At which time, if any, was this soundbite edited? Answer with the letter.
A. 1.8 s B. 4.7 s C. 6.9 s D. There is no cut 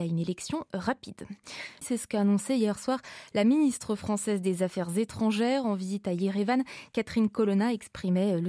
A